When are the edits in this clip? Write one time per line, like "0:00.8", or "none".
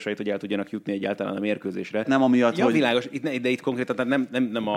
0:02.0